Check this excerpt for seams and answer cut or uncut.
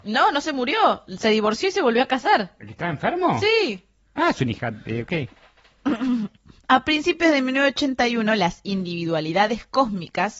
uncut